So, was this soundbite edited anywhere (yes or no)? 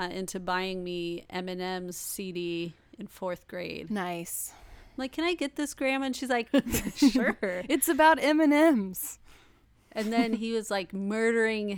yes